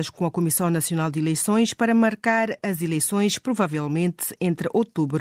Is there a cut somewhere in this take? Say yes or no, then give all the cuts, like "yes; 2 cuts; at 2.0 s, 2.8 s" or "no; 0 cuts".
no; 0 cuts